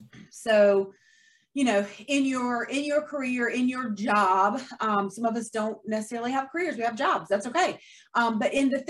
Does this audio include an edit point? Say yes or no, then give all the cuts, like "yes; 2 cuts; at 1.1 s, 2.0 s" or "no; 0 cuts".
no; 0 cuts